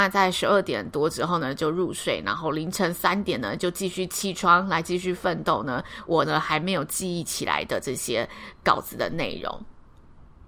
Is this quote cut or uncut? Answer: uncut